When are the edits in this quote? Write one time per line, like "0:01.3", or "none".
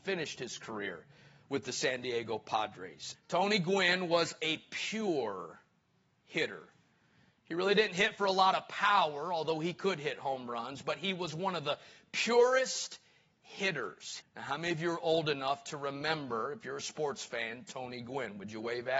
0:03.1
0:14.2